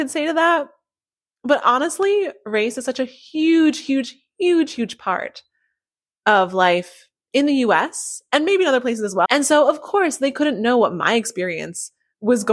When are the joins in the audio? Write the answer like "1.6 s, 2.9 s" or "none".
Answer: 9.3 s